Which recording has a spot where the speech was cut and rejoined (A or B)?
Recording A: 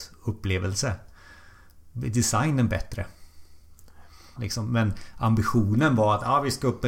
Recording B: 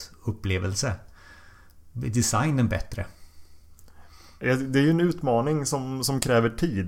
A